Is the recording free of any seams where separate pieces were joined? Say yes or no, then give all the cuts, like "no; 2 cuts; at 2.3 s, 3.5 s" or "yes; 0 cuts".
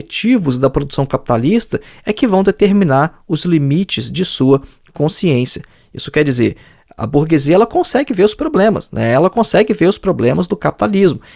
yes; 0 cuts